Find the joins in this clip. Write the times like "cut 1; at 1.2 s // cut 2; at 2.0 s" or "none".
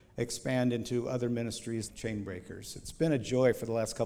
cut 1; at 1.9 s